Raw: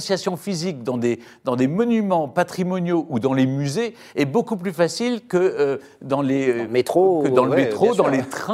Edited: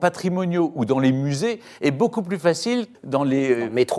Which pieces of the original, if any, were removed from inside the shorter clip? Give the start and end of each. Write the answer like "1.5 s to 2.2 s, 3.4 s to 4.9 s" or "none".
5.3 s to 5.9 s